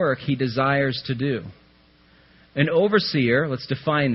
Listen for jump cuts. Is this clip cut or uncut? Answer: uncut